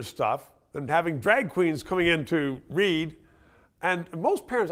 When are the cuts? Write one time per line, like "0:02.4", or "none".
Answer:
none